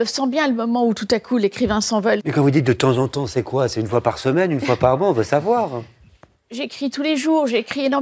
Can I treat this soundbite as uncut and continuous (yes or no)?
no